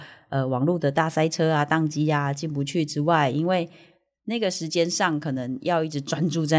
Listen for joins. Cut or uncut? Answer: uncut